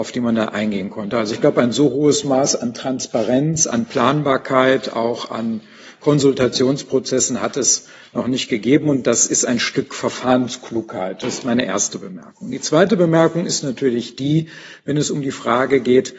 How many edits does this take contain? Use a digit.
0